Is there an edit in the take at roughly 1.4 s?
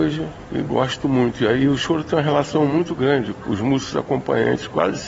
no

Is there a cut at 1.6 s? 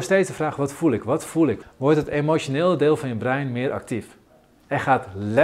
yes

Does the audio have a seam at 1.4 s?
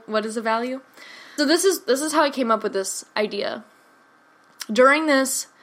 yes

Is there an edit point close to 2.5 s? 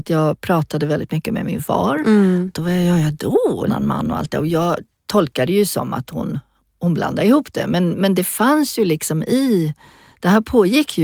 yes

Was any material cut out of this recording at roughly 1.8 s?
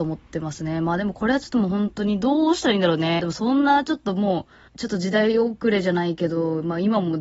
no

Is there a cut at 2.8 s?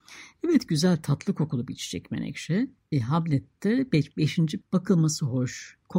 yes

